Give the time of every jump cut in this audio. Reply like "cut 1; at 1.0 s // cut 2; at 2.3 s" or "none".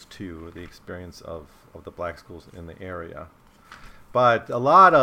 none